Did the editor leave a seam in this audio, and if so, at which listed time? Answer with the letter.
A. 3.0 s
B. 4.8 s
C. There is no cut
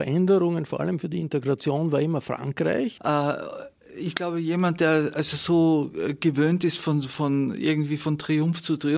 A